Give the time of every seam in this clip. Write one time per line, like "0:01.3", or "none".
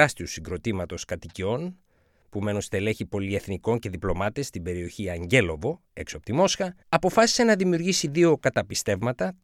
0:06.8